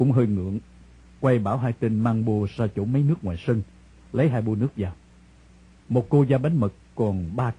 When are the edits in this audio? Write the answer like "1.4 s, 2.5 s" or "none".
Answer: 5.8 s